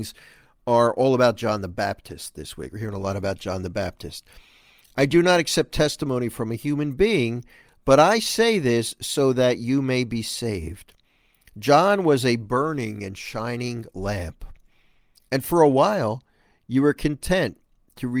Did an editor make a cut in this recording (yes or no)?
no